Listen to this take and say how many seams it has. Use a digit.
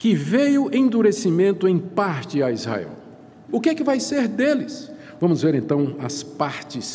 2